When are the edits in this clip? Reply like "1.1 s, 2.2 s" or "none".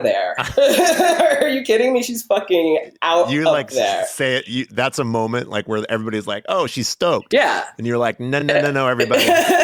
none